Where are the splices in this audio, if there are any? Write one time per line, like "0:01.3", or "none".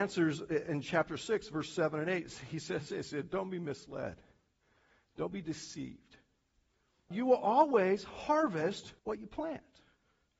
0:07.1
0:09.0